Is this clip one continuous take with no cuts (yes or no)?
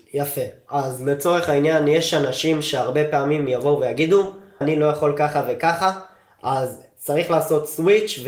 no